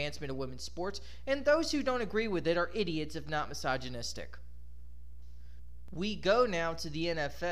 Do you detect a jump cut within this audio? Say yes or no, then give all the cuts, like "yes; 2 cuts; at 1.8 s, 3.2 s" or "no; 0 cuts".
no; 0 cuts